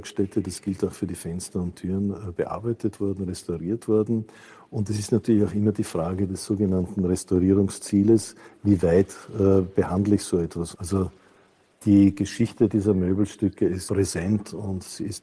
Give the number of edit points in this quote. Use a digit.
2